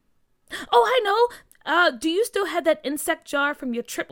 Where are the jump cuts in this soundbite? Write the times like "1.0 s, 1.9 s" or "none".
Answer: none